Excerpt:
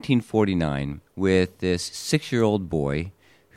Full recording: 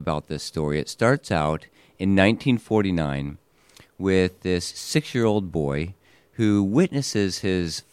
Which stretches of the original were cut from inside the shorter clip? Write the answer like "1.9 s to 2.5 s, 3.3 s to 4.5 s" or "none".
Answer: 3.4 s to 3.9 s